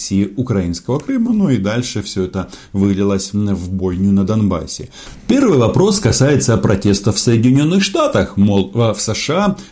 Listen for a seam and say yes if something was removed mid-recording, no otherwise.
no